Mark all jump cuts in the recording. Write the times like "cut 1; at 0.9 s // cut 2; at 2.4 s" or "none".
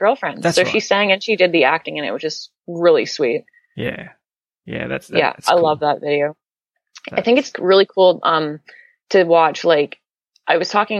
none